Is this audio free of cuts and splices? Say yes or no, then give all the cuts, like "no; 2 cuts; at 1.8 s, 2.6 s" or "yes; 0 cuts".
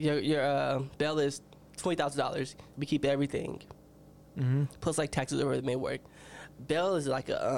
no; 1 cut; at 2.7 s